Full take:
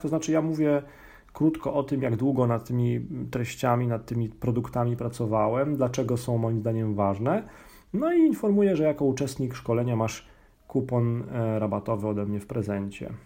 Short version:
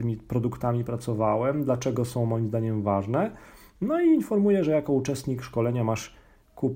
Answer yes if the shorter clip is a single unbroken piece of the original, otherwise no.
yes